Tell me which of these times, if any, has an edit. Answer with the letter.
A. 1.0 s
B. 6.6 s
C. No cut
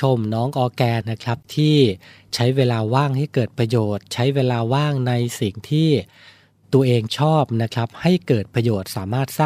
A